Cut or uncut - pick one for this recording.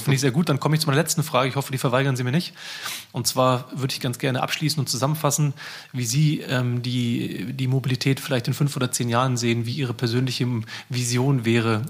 uncut